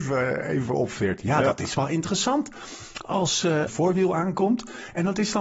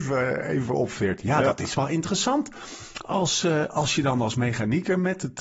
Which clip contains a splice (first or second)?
first